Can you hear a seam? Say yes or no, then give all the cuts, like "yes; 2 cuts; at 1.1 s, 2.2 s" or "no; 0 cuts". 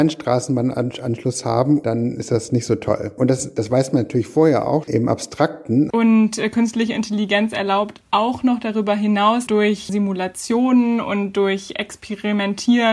yes; 3 cuts; at 4.8 s, 5.9 s, 9.5 s